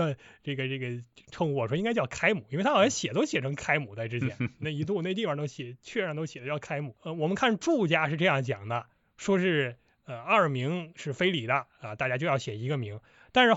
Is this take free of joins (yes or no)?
yes